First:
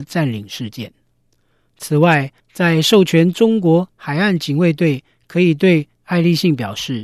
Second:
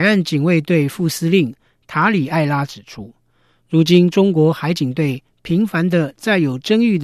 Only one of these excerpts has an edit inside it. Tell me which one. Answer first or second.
first